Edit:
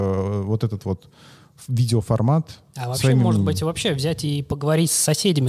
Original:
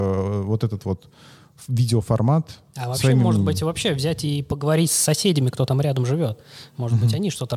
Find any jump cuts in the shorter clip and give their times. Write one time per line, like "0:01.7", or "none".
none